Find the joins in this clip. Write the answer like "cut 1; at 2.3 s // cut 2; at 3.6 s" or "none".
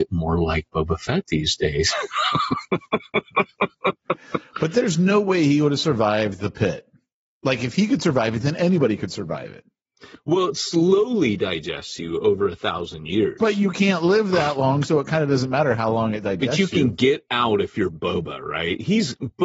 none